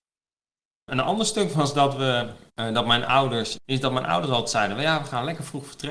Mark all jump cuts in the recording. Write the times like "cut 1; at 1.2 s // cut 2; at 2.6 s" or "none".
cut 1; at 2.5 s // cut 2; at 3.6 s